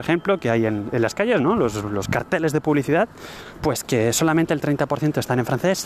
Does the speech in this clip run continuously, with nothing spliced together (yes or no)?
yes